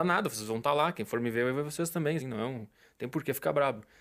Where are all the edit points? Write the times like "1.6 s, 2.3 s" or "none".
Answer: 2.2 s